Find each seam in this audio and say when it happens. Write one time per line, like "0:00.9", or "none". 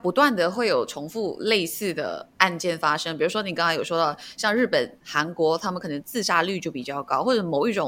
none